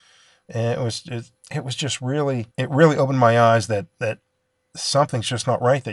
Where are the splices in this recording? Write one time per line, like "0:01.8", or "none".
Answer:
0:01.4
0:02.5